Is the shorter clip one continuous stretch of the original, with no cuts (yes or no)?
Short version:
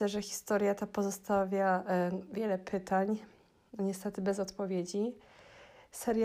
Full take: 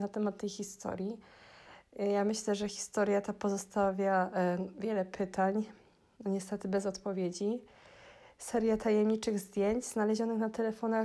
yes